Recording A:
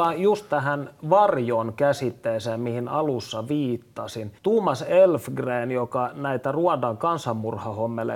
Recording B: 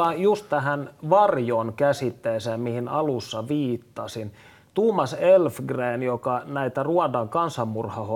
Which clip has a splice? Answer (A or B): A